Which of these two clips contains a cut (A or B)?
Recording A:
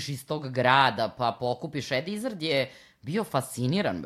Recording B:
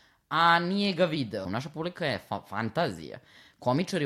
B